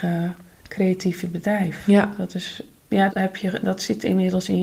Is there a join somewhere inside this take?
yes; 1 cut; at 3.1 s

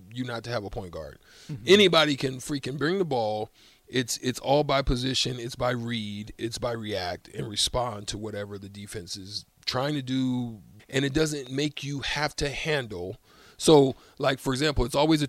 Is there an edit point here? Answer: yes; 1 cut; at 10.8 s

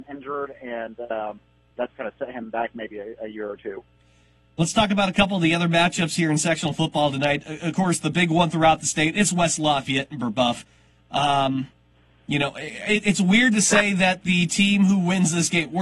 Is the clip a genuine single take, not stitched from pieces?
yes; 0 cuts

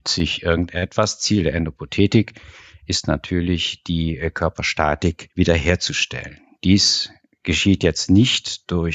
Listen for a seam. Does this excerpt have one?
no; 0 cuts

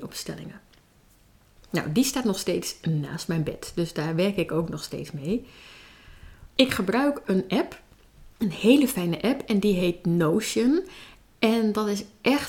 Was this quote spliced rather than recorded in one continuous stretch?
yes; 3 cuts; at 1.6 s, 6.5 s, 8.3 s

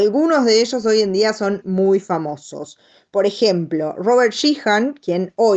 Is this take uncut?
no; 1 cut; at 1.6 s

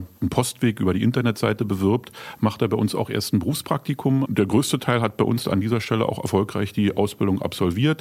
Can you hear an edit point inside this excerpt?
yes; 1 cut; at 4.3 s

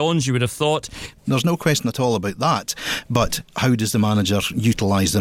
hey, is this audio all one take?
no; 1 cut; at 1.2 s

